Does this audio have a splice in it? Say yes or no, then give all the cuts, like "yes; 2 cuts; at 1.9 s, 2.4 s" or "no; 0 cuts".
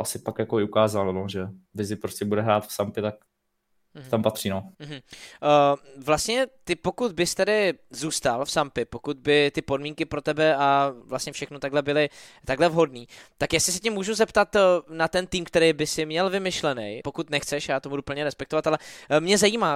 yes; 3 cuts; at 4.7 s, 11.0 s, 17.0 s